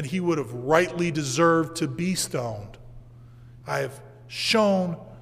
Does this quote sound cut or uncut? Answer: cut